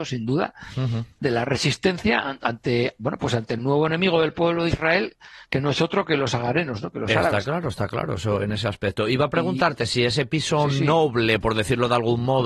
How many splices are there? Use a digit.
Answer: 1